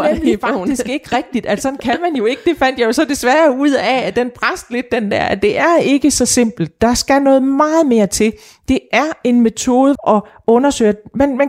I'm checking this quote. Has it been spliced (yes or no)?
yes